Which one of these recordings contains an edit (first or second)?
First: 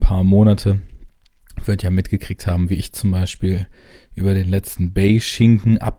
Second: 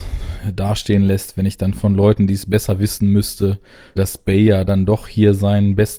second